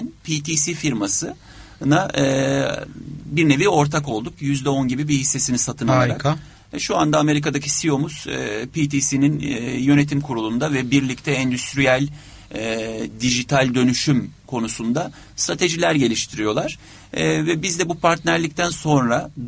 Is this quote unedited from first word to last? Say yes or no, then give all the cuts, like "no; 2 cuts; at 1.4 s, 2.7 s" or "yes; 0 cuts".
no; 1 cut; at 4.4 s